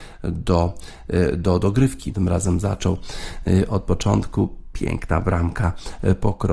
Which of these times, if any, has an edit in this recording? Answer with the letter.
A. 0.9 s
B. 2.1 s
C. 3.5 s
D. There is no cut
B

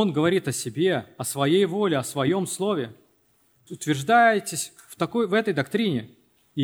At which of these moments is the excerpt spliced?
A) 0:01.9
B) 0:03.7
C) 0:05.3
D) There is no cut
B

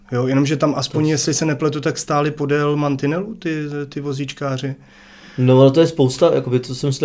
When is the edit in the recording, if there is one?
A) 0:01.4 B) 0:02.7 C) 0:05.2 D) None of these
D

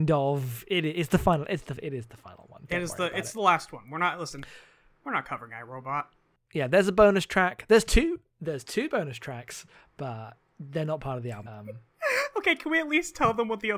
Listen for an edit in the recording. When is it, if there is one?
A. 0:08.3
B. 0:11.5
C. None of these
B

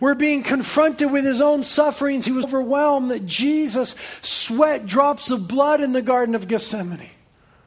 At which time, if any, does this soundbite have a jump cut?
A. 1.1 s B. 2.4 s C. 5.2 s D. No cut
B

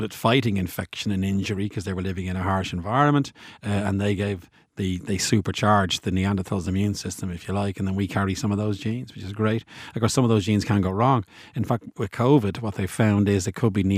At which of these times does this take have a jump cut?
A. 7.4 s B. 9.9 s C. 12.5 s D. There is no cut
D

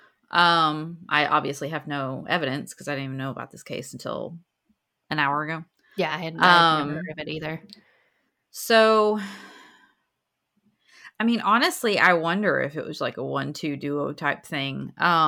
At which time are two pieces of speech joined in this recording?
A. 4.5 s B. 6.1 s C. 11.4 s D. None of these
D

